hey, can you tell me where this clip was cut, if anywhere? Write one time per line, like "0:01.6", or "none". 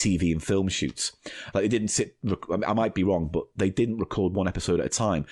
0:01.5